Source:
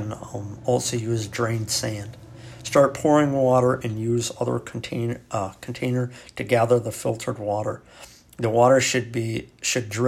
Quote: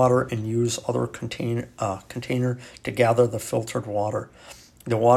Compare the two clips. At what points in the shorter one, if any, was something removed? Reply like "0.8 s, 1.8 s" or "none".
none